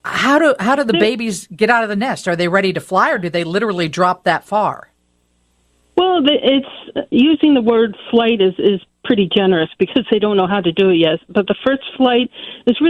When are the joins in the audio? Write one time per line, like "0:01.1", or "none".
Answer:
none